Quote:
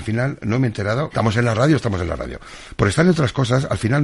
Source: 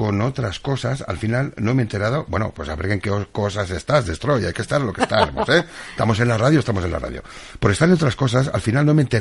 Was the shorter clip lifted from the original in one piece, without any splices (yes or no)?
no